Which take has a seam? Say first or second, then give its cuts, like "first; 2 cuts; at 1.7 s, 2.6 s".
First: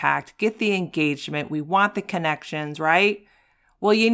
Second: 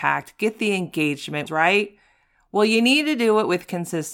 second; 1 cut; at 1.5 s